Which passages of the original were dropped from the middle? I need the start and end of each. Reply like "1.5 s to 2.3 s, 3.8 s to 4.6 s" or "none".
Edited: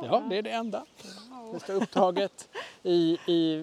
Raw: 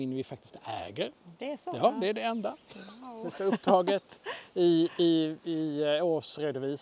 none